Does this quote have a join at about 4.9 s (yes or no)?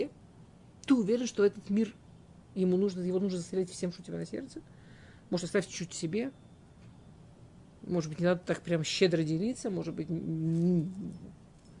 no